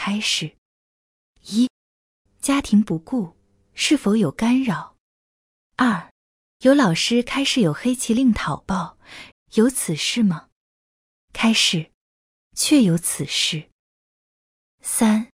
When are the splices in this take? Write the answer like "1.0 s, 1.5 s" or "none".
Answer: 2.3 s, 5.7 s, 9.3 s